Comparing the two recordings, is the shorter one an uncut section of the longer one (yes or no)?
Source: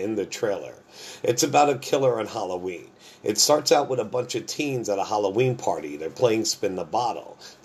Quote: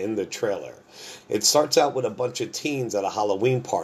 no